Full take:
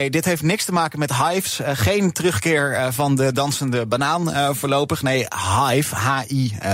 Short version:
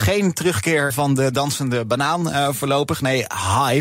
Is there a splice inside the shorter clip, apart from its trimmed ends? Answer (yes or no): yes